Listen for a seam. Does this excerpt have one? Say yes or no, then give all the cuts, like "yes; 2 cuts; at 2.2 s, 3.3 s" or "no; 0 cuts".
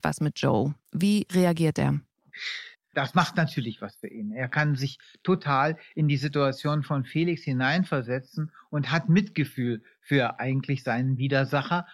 yes; 1 cut; at 2.7 s